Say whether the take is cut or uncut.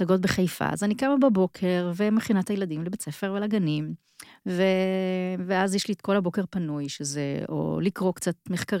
uncut